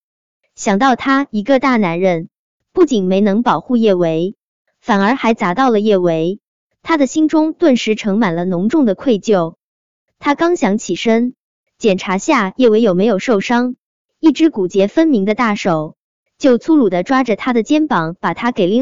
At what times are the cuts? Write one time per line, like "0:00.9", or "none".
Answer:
none

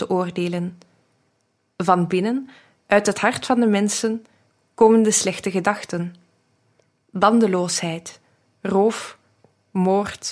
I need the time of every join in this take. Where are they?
none

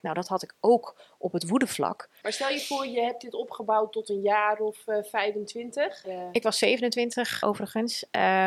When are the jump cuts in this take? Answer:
0:02.2
0:06.0
0:07.4

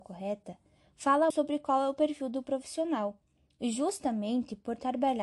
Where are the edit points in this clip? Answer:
0:01.3

